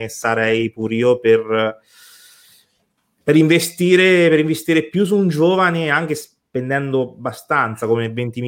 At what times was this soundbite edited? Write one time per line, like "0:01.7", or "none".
none